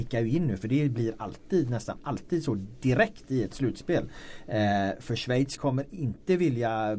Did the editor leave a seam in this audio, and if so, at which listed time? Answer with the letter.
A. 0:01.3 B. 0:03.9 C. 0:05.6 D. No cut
C